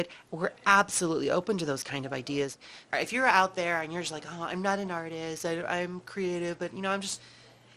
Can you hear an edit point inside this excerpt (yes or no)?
no